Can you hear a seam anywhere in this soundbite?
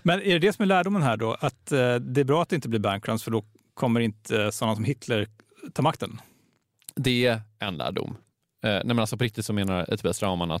no; 0 cuts

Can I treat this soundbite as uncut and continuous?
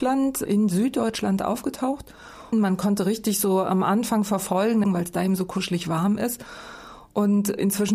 no; 2 cuts; at 2.5 s, 4.8 s

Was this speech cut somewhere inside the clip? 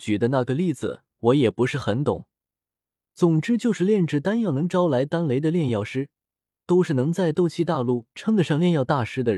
no; 0 cuts

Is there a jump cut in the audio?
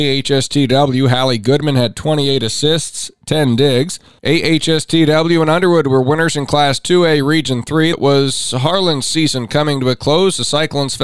yes; 2 cuts; at 4.2 s, 7.9 s

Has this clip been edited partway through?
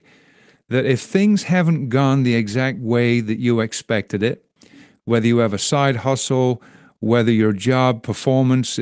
no; 0 cuts

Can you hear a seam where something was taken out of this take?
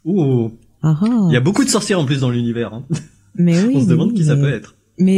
no; 0 cuts

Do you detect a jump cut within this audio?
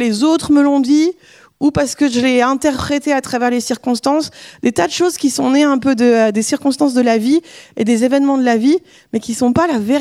no; 0 cuts

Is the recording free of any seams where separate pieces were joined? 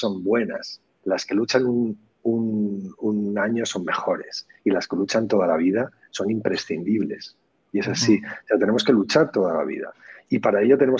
yes; 0 cuts

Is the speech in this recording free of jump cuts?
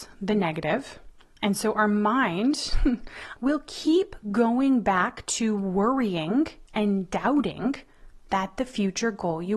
no; 1 cut; at 3.4 s

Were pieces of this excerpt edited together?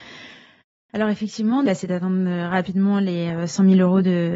yes; 1 cut; at 1.7 s

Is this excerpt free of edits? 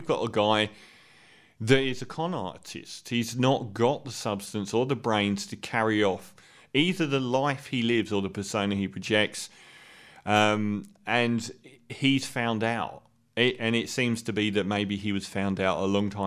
yes; 0 cuts

